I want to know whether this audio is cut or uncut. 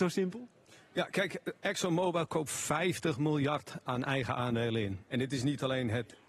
cut